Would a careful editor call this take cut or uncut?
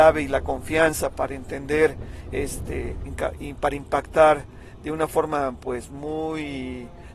cut